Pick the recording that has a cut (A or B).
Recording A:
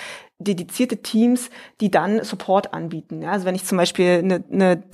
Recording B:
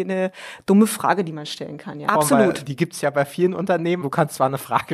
B